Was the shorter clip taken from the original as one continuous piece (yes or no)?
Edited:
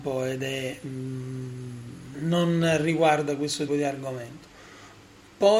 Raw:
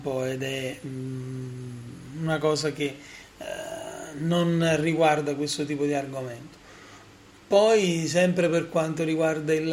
no